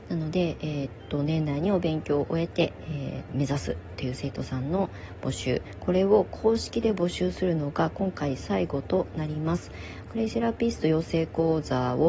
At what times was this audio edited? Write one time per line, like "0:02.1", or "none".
0:03.3